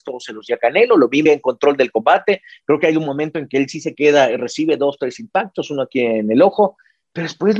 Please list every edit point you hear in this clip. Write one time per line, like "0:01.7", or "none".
0:01.3